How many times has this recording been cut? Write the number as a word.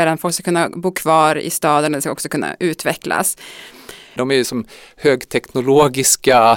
one